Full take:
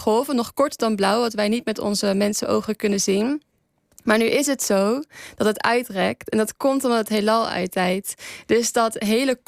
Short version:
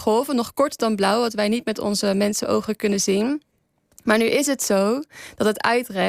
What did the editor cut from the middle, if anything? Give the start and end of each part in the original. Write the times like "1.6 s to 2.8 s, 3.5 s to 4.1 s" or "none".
none